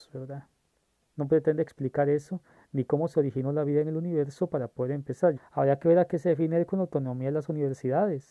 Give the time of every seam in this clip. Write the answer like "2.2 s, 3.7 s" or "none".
1.1 s, 5.4 s